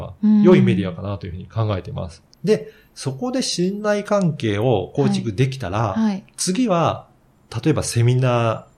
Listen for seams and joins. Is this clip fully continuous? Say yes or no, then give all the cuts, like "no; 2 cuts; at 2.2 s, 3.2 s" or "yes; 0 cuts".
no; 1 cut; at 2.3 s